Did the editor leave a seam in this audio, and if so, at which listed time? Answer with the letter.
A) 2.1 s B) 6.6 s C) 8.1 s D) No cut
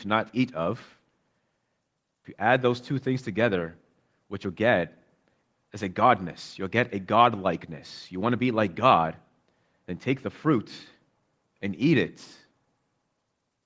D